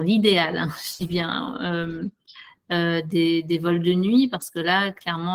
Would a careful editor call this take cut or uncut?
cut